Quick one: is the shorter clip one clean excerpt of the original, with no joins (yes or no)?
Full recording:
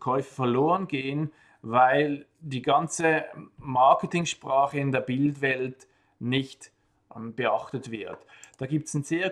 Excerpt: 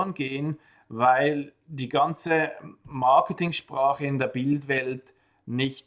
yes